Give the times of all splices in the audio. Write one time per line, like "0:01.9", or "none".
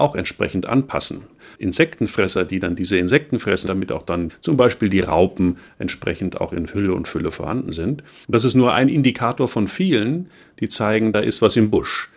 0:01.6
0:03.7
0:08.2